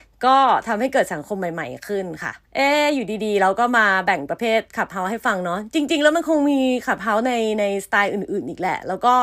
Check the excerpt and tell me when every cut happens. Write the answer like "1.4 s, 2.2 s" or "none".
2.5 s